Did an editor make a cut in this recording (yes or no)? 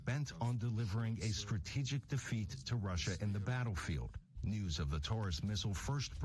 yes